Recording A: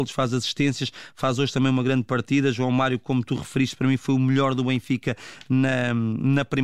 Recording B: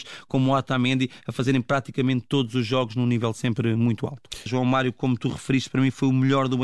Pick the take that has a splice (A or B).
B